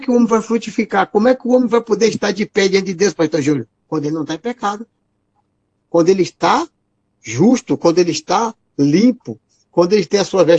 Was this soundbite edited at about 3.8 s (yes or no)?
yes